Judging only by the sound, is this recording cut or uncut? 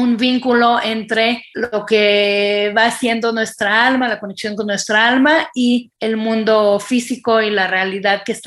uncut